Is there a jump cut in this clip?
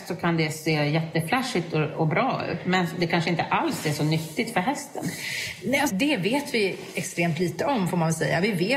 yes; 1 cut; at 5.9 s

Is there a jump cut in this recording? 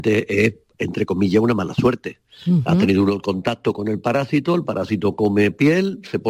no; 0 cuts

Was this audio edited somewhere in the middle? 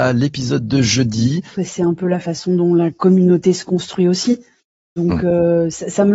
yes; 1 cut; at 1.5 s

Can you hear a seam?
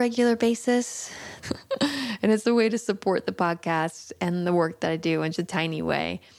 yes; 2 cuts; at 1.4 s, 5.4 s

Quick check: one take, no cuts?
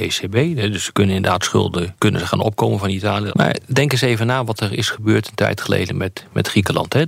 no; 1 cut; at 3.3 s

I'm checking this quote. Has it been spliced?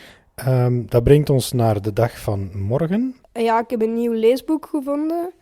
yes; 1 cut; at 3.2 s

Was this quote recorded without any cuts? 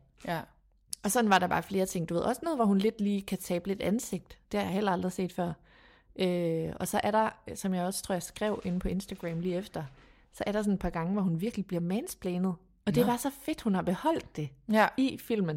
yes; 0 cuts

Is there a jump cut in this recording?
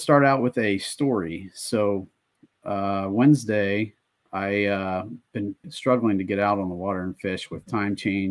yes; 2 cuts; at 4.2 s, 5.6 s

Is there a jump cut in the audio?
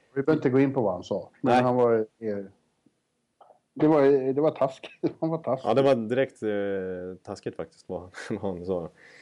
no; 0 cuts

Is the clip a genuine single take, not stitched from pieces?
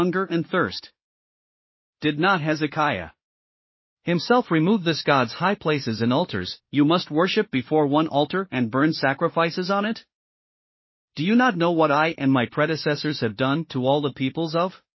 no; 1 cut; at 6.6 s

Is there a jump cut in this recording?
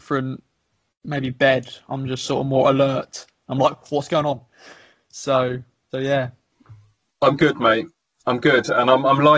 yes; 1 cut; at 5.9 s

